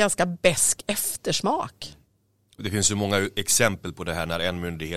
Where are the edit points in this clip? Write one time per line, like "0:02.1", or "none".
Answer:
0:02.6